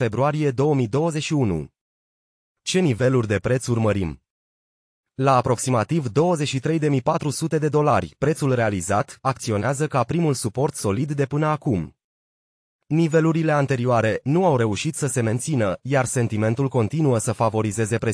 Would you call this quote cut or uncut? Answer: cut